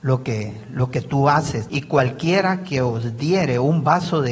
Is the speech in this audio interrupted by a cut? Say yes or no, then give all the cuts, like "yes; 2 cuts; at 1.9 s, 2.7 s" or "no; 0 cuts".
yes; 1 cut; at 1.7 s